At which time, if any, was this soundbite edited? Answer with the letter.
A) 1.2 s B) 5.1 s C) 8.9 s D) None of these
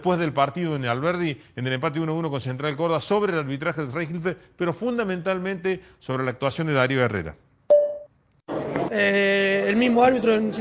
C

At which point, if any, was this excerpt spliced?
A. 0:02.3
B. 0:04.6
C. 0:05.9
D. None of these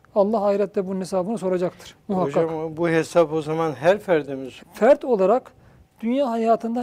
B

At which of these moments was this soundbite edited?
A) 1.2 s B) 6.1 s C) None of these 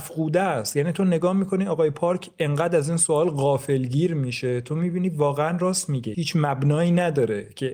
B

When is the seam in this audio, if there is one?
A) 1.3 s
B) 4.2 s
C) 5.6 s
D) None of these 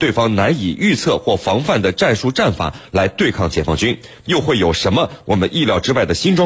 B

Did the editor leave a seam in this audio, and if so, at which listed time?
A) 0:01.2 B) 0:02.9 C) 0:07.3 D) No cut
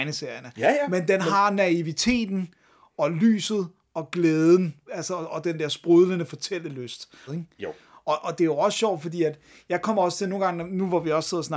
C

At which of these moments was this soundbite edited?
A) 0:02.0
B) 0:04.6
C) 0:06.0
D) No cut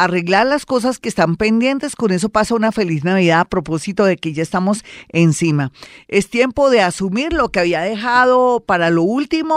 D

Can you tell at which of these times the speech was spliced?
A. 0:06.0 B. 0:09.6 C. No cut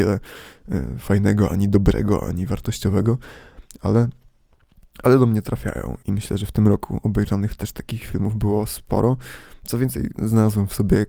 A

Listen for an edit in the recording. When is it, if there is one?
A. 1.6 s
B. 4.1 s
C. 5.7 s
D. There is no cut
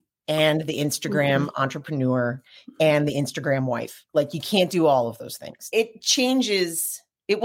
C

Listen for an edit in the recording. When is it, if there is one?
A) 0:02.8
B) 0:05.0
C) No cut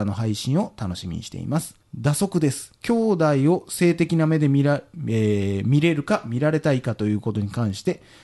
A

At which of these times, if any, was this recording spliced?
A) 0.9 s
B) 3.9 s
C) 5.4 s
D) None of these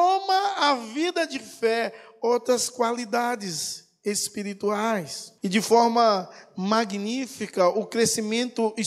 C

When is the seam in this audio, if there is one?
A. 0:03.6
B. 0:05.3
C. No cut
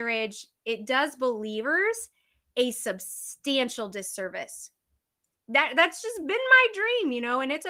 B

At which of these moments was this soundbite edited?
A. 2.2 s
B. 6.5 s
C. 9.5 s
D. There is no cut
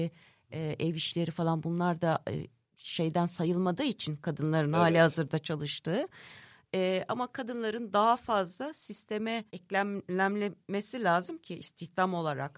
C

